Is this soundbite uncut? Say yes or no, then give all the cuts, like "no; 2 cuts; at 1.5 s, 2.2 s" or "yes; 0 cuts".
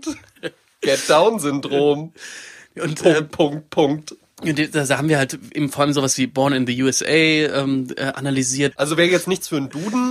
no; 1 cut; at 8.7 s